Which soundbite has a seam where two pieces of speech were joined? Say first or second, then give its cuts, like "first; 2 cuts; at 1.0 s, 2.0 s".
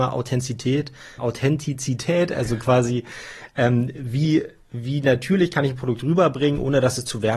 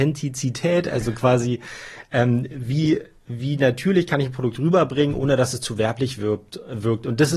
first; 1 cut; at 1.2 s